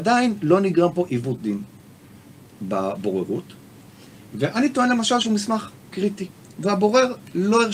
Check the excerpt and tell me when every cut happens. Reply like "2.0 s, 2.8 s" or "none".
2.6 s